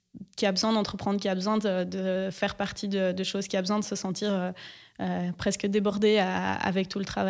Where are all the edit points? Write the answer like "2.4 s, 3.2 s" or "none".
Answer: none